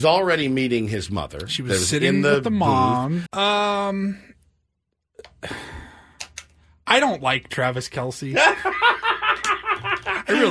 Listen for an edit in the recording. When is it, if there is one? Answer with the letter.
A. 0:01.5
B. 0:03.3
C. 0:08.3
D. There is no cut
B